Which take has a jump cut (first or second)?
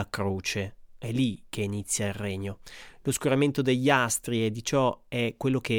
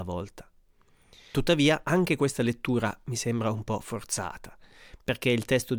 second